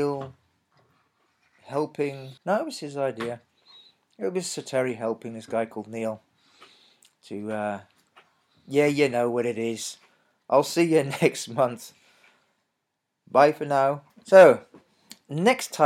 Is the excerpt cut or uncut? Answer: cut